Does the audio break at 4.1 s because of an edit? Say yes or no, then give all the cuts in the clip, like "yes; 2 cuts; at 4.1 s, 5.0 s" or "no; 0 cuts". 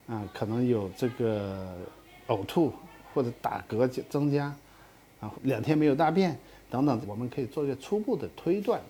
no; 2 cuts; at 5.3 s, 7.0 s